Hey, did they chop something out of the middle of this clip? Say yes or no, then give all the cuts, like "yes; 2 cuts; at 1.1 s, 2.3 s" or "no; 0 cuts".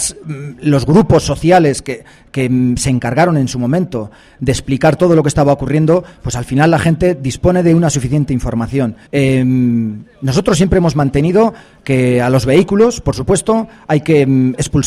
yes; 1 cut; at 9.1 s